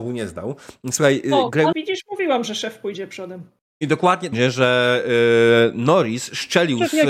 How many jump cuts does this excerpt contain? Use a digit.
2